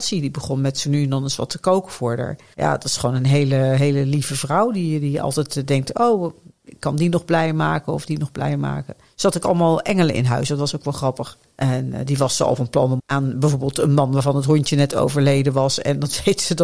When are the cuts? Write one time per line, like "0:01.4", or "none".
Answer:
0:02.5
0:11.4
0:13.0